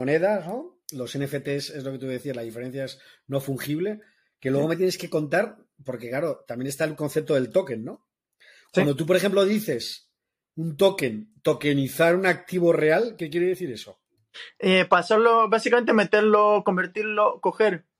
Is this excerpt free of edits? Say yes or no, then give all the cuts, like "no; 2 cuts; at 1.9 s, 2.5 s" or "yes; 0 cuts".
yes; 0 cuts